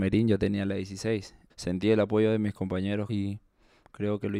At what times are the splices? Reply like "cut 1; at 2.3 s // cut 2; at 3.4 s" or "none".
cut 1; at 1.5 s // cut 2; at 3.1 s

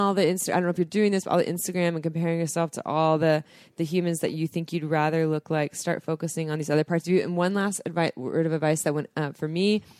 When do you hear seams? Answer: none

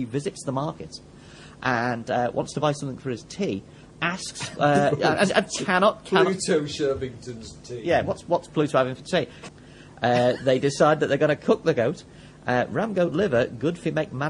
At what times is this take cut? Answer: cut 1; at 9.5 s

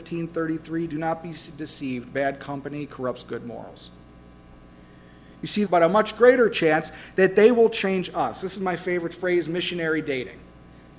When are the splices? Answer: cut 1; at 5.7 s

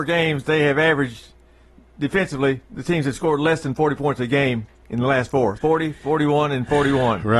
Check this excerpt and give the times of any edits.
cut 1; at 2.6 s // cut 2; at 5.6 s

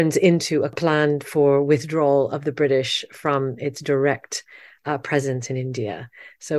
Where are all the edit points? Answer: none

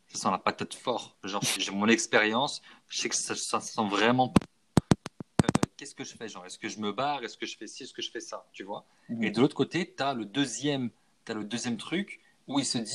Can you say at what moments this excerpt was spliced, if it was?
cut 1; at 1.6 s

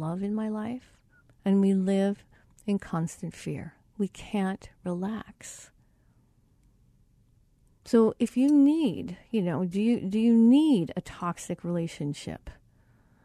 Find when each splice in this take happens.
cut 1; at 1.3 s

